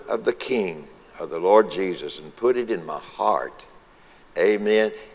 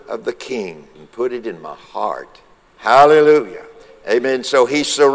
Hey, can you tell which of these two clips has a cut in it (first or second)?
second